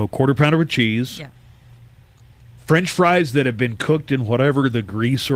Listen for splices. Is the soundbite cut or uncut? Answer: uncut